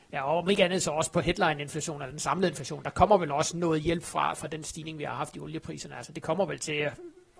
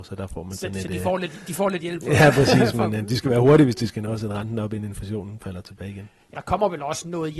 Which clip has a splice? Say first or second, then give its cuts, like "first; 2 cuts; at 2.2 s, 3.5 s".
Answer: second; 1 cut; at 6.3 s